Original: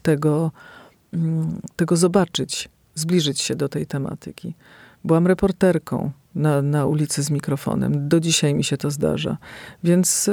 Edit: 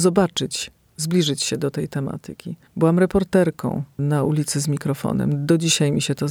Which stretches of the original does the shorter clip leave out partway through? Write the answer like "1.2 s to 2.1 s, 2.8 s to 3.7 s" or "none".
4.6 s to 4.9 s, 6.3 s to 6.6 s